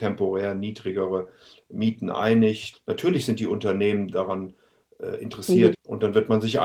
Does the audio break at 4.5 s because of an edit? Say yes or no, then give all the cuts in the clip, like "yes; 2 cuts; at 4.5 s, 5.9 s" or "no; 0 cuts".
no; 2 cuts; at 2.7 s, 5.7 s